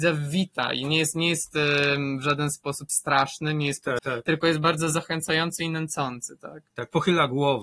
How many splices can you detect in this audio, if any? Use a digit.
2